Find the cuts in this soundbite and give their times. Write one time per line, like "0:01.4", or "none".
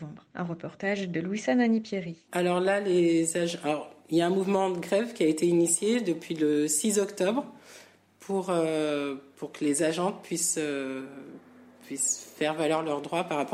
none